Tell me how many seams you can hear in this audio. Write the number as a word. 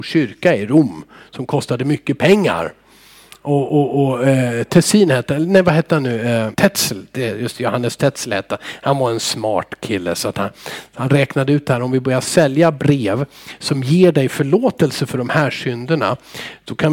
one